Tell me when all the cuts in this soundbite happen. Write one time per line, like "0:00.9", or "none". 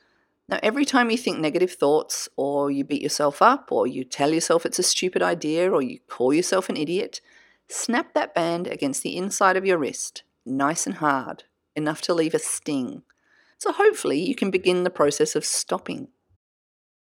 0:13.5